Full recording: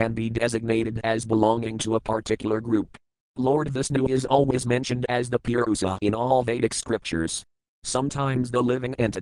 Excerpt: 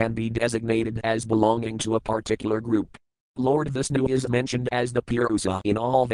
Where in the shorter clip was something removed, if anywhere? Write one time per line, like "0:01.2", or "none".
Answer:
0:04.3